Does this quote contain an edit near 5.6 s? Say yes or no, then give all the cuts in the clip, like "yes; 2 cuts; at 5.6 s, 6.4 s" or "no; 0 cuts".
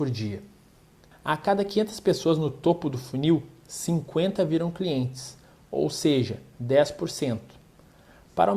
no; 1 cut; at 1.1 s